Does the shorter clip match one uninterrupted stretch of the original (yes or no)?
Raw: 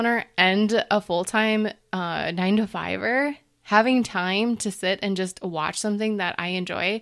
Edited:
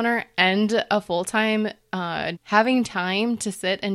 no